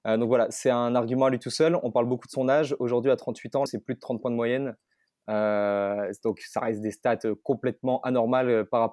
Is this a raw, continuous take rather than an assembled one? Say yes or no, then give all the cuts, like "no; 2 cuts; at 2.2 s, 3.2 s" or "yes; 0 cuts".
no; 1 cut; at 3.7 s